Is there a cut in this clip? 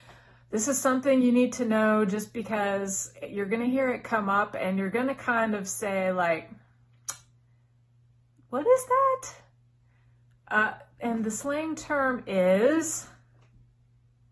no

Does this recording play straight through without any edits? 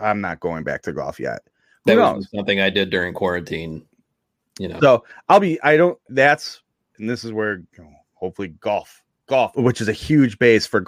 no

